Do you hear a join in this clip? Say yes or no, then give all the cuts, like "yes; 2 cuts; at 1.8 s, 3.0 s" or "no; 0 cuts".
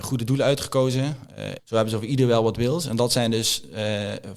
yes; 1 cut; at 1.6 s